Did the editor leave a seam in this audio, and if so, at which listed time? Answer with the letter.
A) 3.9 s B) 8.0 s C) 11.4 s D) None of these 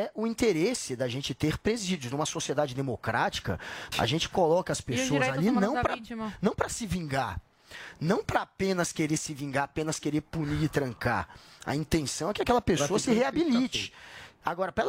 A